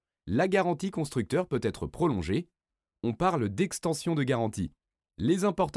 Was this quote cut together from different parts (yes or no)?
no